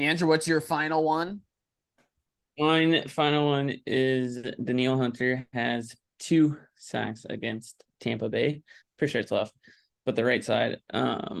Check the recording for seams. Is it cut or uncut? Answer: cut